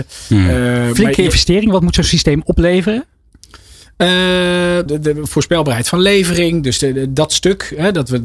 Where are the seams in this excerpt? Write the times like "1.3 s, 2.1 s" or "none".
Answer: 4.9 s